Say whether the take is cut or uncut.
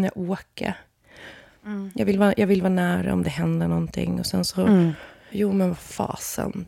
cut